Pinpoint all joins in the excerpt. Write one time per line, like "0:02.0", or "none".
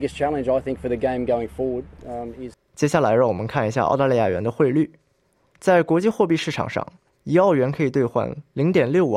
0:02.5